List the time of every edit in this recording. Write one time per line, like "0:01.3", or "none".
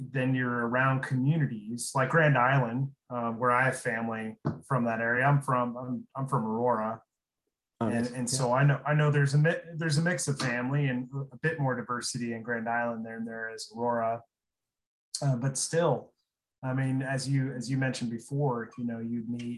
none